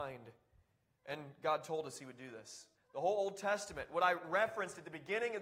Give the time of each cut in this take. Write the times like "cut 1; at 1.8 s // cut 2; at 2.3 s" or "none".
cut 1; at 2.7 s